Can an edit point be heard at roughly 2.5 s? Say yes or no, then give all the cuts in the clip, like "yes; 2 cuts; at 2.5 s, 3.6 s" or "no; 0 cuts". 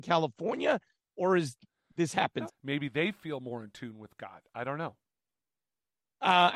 yes; 1 cut; at 2.5 s